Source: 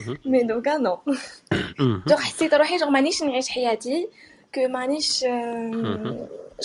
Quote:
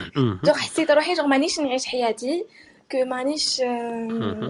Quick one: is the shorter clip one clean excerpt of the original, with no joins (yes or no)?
yes